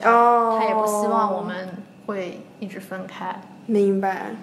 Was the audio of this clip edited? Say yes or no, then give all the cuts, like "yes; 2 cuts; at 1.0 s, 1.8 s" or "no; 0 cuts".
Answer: no; 0 cuts